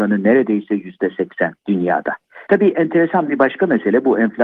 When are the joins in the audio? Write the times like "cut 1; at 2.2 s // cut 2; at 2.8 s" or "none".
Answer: cut 1; at 2.5 s